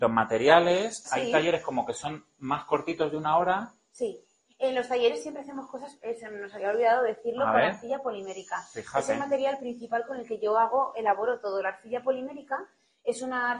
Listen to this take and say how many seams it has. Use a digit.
1